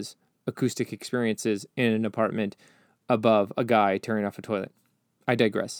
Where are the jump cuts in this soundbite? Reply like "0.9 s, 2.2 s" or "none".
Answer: none